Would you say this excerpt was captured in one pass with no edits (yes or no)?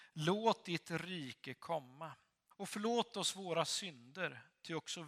no